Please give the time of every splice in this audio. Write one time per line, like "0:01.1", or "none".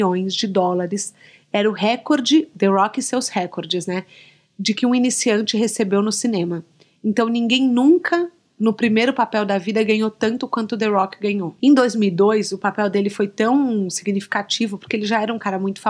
none